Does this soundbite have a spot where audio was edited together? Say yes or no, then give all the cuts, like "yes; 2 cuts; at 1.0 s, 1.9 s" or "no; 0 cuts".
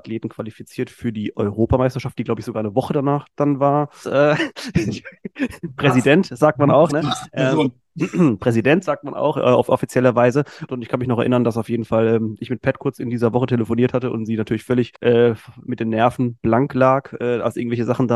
yes; 3 cuts; at 4.0 s, 10.7 s, 15.0 s